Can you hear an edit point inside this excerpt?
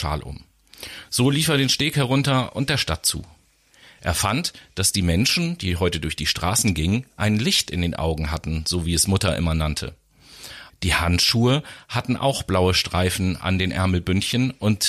yes; 2 cuts; at 4.0 s, 10.7 s

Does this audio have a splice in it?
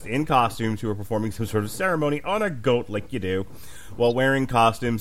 no; 0 cuts

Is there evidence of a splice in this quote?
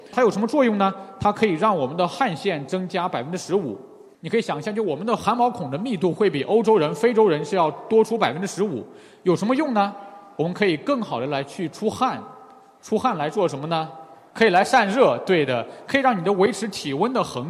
no; 0 cuts

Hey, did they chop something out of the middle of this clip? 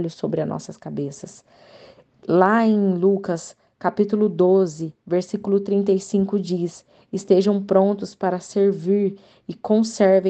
no; 0 cuts

